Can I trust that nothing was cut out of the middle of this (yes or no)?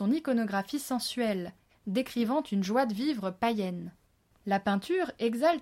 no